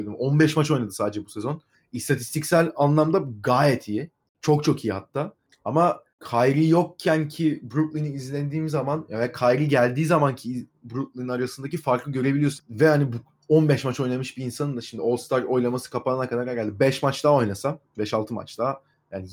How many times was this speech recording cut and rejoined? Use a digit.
1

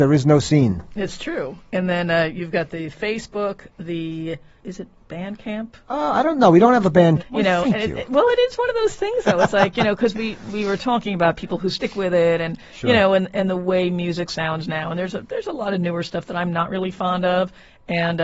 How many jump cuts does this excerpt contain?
1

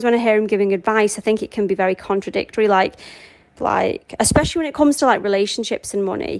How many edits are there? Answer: 1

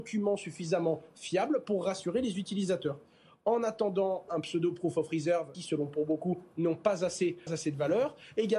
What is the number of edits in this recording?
3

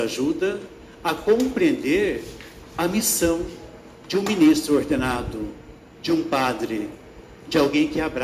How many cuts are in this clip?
0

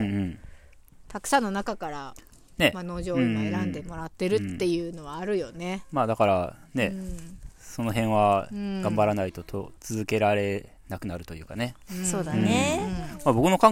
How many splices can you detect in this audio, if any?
1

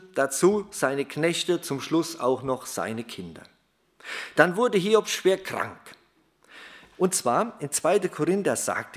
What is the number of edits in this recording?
1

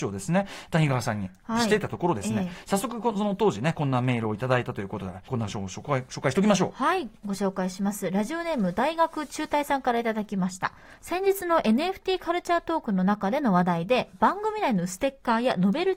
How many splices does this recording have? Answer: 1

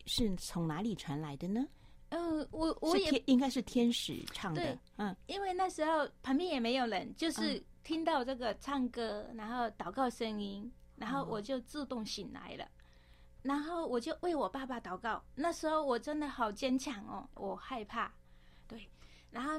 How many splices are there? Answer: 2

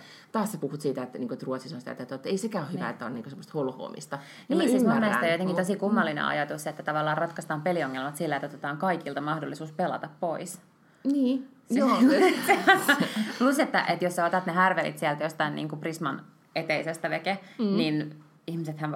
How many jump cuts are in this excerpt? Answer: 0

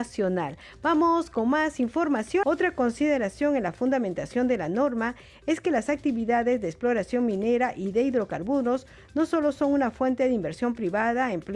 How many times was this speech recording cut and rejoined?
1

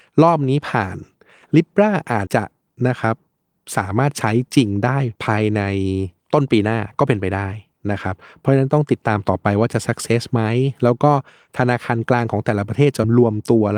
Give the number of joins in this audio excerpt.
2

